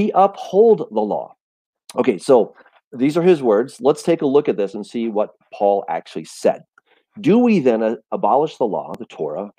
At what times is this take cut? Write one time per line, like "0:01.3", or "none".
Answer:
0:01.8